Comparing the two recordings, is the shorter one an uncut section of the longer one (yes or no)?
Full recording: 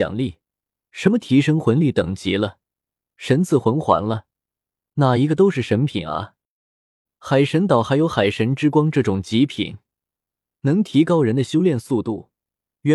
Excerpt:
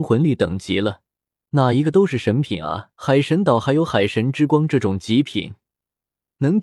no